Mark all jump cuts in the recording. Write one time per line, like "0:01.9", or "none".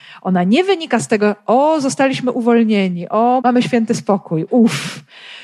0:03.4
0:04.5